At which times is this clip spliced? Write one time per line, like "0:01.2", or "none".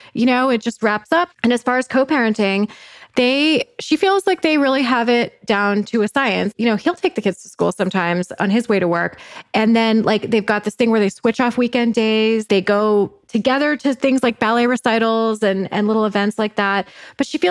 0:01.3